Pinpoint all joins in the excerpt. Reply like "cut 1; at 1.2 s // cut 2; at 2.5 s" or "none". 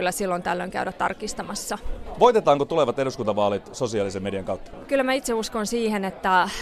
none

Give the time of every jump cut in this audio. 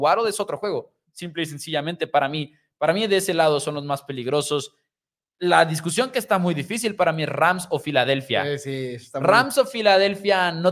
none

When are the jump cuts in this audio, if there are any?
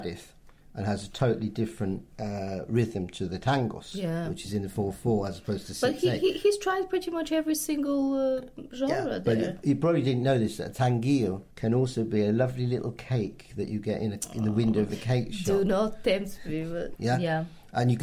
cut 1; at 11.5 s // cut 2; at 17.0 s

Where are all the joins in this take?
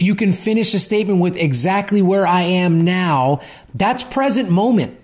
none

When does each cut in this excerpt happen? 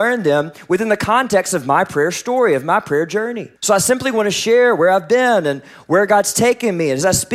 cut 1; at 3.6 s

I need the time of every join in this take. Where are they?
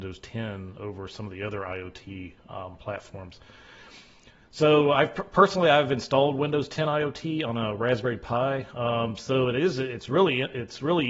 none

